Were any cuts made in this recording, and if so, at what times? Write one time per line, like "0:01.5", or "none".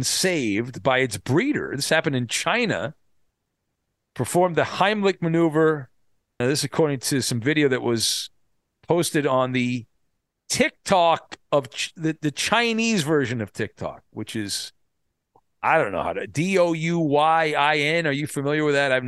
0:06.4